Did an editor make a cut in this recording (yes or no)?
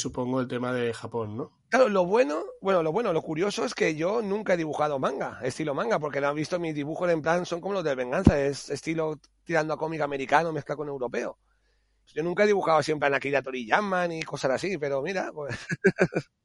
yes